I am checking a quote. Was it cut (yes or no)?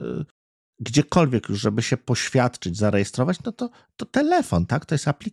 no